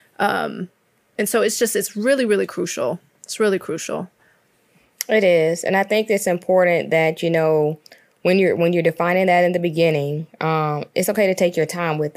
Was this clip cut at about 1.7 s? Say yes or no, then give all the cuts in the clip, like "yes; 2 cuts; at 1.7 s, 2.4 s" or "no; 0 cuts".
no; 0 cuts